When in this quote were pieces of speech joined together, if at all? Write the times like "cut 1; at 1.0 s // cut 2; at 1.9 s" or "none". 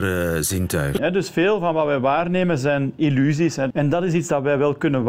cut 1; at 1.0 s // cut 2; at 3.7 s